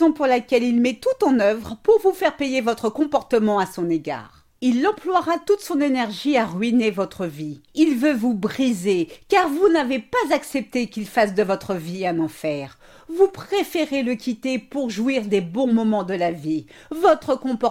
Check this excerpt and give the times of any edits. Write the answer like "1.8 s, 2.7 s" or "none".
7.7 s